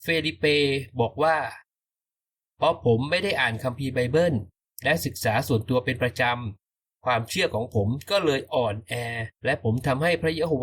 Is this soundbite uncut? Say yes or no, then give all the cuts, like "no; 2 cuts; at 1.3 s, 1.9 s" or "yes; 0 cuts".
no; 1 cut; at 9.4 s